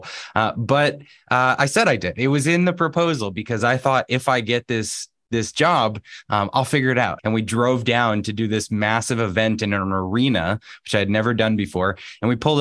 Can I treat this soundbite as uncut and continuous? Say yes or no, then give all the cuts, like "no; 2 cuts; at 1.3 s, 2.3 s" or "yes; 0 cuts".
no; 1 cut; at 7.2 s